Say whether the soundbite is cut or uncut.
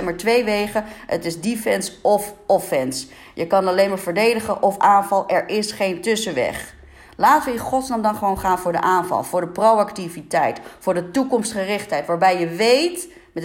uncut